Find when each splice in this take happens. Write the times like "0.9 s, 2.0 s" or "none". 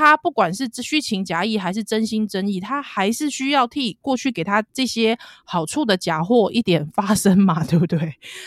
none